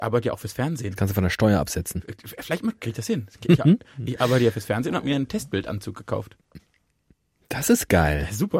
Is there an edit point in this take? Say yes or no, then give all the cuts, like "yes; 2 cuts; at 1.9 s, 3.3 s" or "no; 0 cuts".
no; 0 cuts